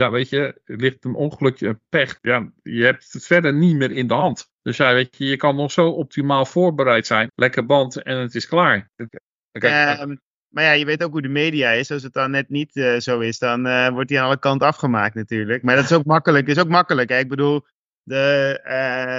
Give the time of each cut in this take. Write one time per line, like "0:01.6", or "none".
0:02.2
0:07.3
0:09.1